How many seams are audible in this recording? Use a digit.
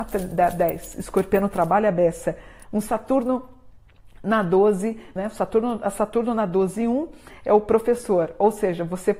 2